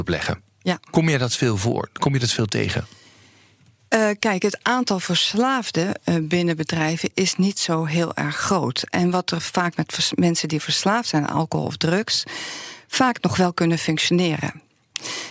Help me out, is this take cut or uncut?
uncut